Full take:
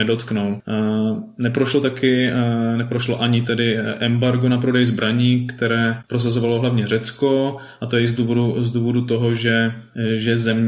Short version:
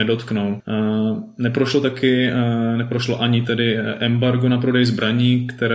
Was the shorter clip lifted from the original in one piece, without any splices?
yes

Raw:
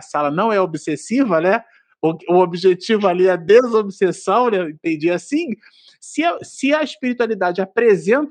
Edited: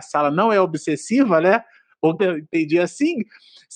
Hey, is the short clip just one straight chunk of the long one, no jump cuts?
no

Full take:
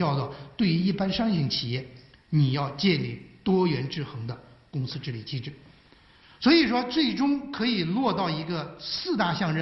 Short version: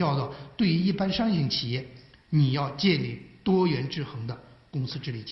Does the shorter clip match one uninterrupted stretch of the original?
yes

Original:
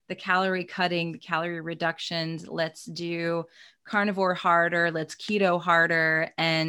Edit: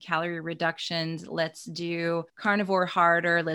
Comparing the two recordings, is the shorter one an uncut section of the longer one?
no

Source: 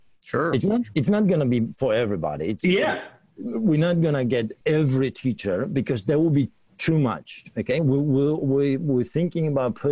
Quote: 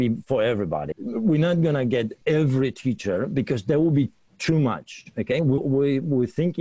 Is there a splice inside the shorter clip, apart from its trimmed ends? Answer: yes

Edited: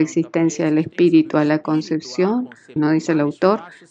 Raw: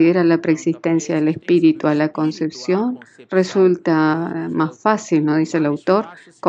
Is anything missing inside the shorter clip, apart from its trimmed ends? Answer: yes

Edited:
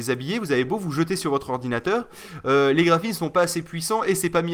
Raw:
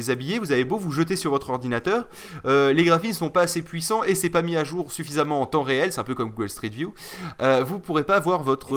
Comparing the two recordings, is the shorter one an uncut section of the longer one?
yes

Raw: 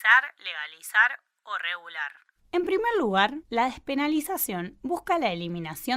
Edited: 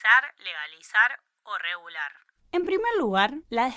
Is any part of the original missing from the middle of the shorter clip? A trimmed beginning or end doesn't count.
no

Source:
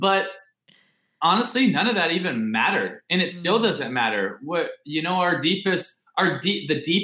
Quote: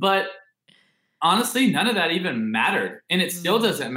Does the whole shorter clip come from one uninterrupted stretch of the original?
yes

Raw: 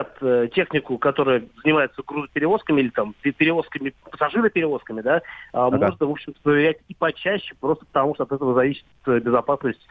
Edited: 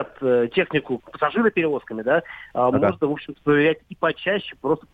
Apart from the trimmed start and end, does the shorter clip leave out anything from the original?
yes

